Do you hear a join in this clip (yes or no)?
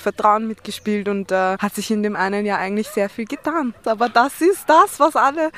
yes